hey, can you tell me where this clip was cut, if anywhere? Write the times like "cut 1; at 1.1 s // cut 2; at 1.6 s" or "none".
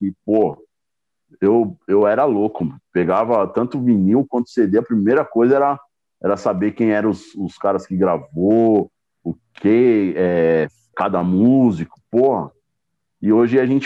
cut 1; at 10.9 s